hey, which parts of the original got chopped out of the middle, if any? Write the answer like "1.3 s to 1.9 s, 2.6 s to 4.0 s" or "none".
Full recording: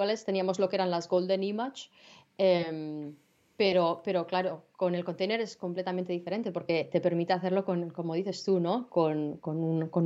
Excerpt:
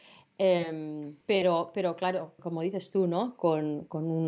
3.2 s to 3.5 s, 4.7 s to 7.9 s